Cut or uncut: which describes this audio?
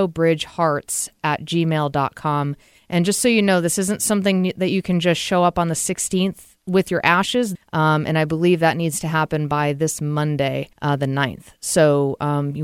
cut